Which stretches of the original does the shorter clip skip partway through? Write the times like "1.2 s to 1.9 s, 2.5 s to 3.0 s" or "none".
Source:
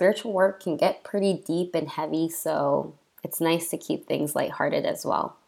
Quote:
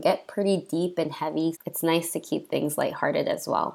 2.3 s to 3.1 s